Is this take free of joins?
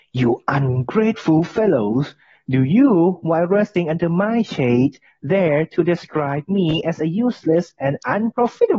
yes; 0 cuts

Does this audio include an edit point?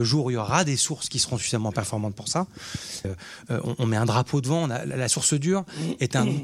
yes; 1 cut; at 3.0 s

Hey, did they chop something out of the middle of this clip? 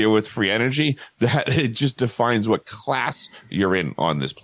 no; 0 cuts

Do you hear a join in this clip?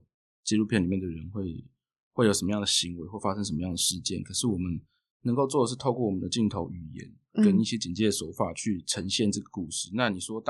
no; 0 cuts

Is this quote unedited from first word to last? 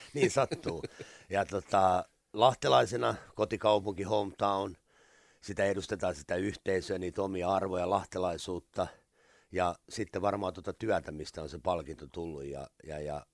yes; 0 cuts

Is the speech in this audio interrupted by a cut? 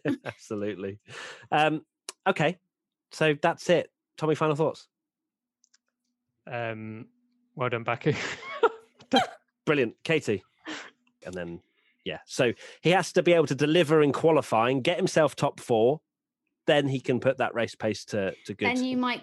yes; 1 cut; at 11.2 s

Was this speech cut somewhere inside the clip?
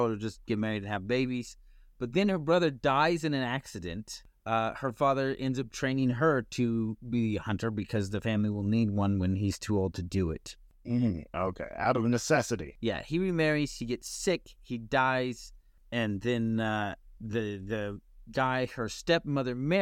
no; 0 cuts

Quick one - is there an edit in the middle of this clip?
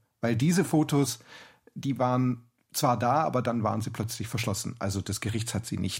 no; 0 cuts

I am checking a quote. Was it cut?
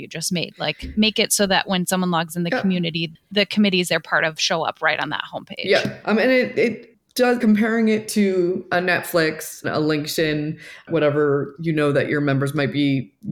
yes; 2 cuts; at 7.4 s, 9.6 s

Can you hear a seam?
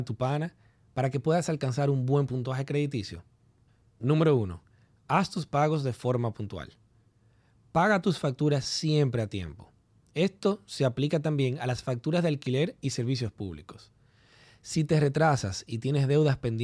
no; 0 cuts

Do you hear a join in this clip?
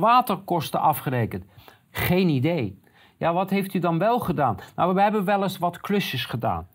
no; 0 cuts

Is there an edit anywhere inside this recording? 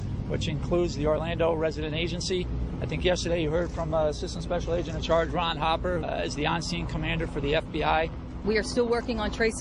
yes; 2 cuts; at 6.0 s, 8.4 s

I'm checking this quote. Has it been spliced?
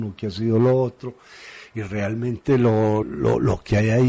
yes; 1 cut; at 3.0 s

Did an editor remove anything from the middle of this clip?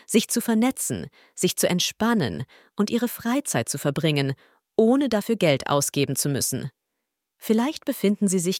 no; 0 cuts

